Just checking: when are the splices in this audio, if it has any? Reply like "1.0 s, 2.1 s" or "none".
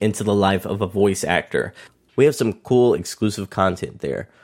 2.1 s